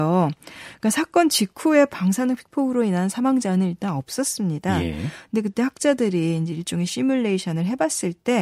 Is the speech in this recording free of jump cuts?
yes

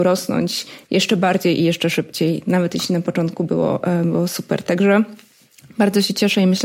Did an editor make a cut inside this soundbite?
no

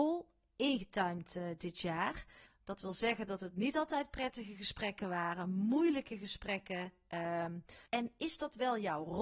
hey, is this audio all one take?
no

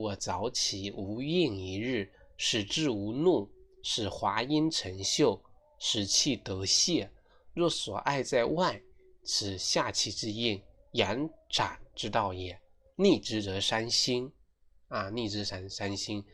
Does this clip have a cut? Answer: no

